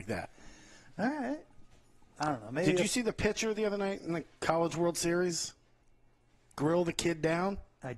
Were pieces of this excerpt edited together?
no; 0 cuts

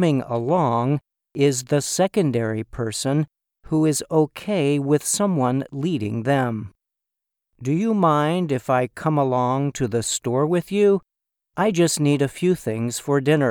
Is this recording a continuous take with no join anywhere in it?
yes; 0 cuts

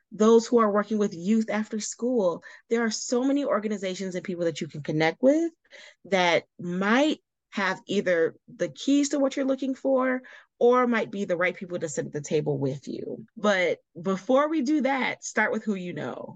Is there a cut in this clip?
yes; 1 cut; at 13.3 s

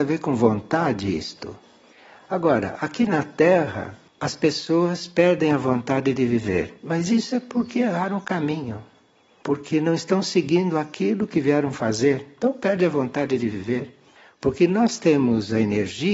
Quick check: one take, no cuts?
yes; 0 cuts

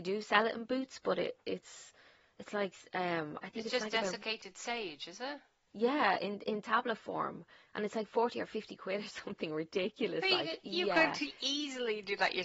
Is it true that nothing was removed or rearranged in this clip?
yes; 0 cuts

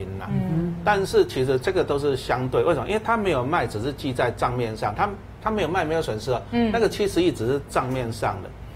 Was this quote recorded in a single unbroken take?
yes; 0 cuts

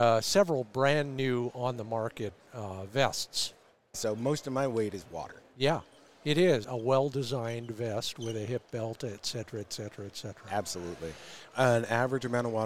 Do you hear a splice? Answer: yes; 3 cuts; at 3.9 s, 6.6 s, 11.5 s

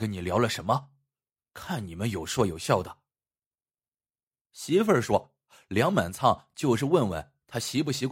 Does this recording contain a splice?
no; 0 cuts

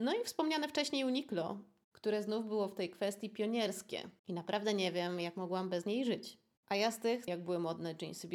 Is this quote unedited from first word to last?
no; 2 cuts; at 4.2 s, 7.3 s

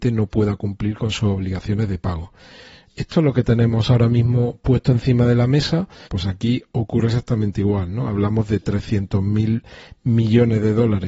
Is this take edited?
yes; 1 cut; at 6.1 s

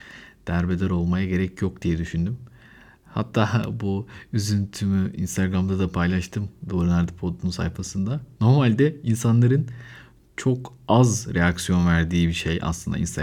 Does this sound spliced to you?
no; 0 cuts

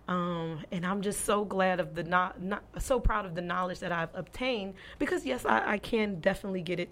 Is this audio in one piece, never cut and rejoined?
yes; 0 cuts

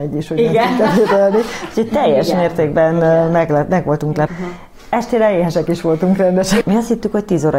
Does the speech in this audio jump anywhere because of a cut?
yes; 2 cuts; at 4.3 s, 6.6 s

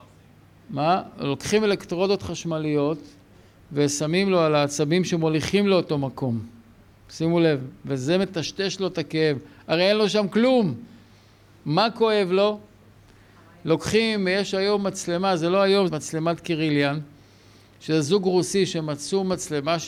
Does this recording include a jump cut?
yes; 1 cut; at 15.9 s

